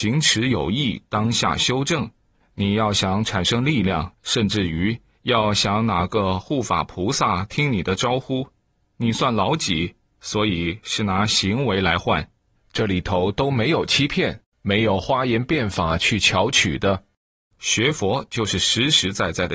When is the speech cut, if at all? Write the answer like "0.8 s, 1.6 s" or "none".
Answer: 2.4 s, 14.4 s